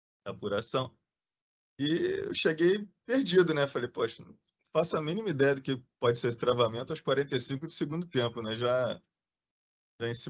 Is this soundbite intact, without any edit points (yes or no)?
yes